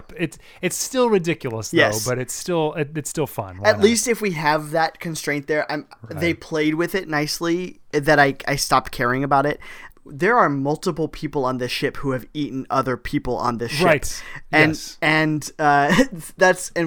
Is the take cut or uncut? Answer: cut